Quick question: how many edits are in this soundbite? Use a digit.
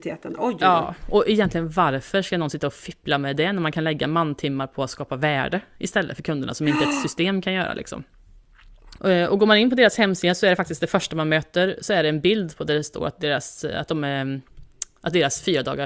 1